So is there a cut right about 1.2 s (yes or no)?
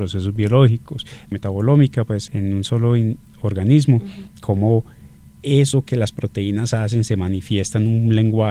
no